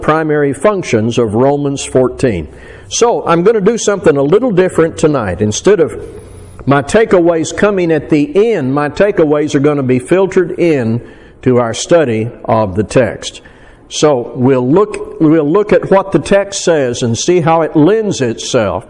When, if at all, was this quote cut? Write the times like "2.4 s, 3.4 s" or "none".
none